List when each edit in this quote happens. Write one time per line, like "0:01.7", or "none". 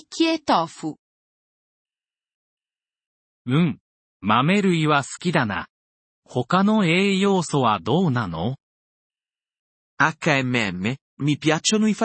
none